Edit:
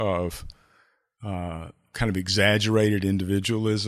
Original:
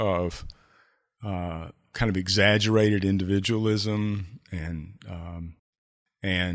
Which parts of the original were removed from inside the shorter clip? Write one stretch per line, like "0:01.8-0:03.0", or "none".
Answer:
none